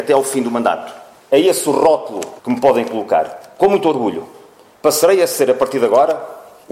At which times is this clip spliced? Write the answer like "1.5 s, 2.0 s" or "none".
1.2 s, 2.4 s